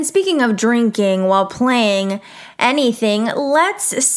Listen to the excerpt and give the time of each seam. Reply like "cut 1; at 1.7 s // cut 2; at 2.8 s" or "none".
none